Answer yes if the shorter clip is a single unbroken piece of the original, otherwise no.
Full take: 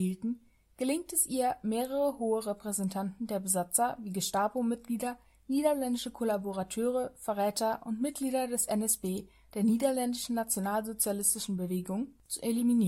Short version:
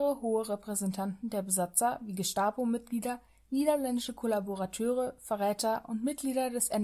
yes